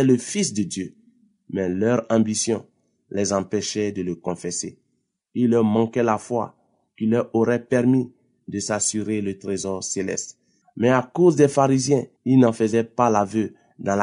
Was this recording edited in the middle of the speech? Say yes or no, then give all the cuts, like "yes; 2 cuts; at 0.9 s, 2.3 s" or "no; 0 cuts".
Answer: yes; 2 cuts; at 10.6 s, 12.2 s